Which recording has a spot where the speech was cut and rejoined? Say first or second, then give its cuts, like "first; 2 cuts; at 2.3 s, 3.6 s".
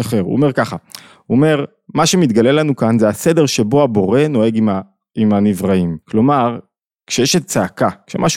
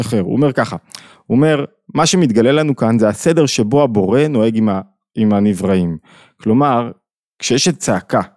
first; 1 cut; at 6.0 s